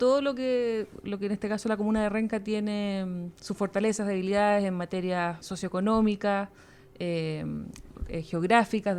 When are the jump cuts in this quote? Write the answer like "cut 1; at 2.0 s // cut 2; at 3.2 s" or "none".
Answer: cut 1; at 5.4 s // cut 2; at 7.9 s